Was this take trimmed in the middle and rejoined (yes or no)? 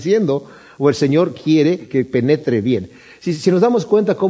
no